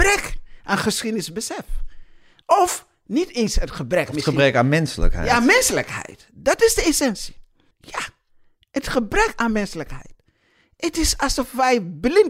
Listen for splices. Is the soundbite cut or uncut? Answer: cut